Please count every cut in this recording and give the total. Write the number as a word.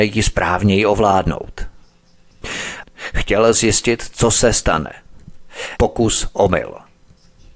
two